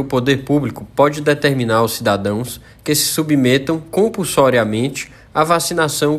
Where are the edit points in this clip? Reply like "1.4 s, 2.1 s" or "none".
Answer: none